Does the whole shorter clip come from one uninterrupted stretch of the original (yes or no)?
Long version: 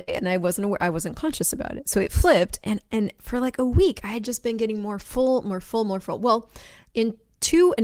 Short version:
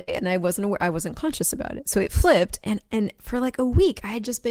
yes